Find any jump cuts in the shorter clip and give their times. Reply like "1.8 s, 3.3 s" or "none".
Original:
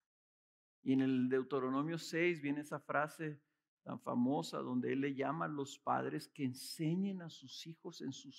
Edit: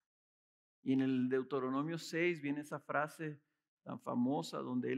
none